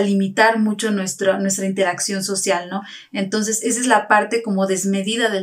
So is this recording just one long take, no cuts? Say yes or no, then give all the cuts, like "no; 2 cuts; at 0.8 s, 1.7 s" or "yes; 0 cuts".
yes; 0 cuts